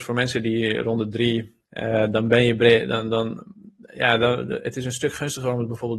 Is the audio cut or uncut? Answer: cut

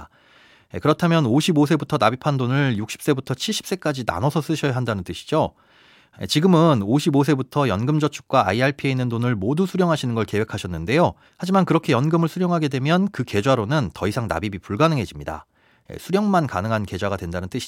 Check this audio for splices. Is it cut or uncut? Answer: cut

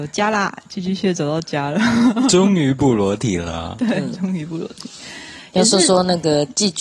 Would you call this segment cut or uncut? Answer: uncut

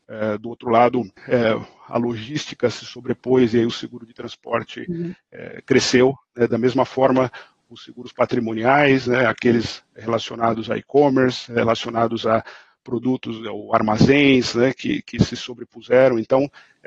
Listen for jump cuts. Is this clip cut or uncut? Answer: cut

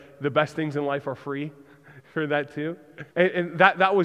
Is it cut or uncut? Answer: cut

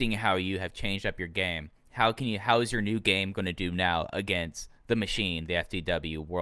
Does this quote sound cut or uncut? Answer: cut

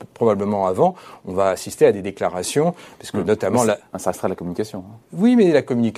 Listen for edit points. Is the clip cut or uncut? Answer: cut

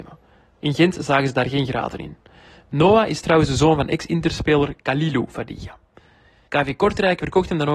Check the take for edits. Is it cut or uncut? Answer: cut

